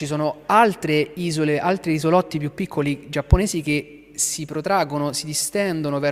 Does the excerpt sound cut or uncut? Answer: uncut